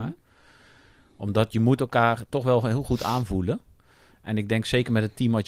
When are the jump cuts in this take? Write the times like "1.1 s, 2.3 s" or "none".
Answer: none